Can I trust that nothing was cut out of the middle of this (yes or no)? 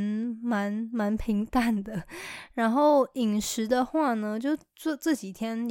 yes